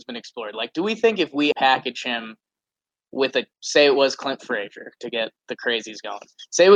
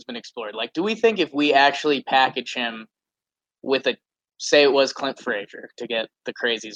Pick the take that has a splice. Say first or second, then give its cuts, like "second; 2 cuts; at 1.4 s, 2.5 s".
first; 2 cuts; at 1.5 s, 3.5 s